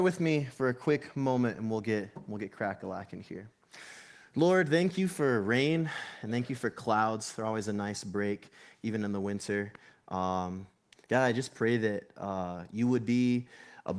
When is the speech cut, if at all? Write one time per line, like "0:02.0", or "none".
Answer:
none